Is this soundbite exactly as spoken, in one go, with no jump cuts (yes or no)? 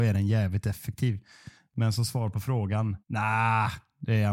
no